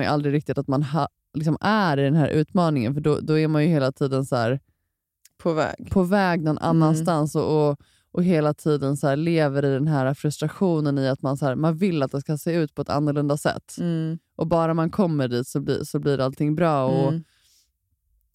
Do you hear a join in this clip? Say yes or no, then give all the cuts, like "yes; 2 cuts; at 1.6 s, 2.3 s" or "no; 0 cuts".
no; 0 cuts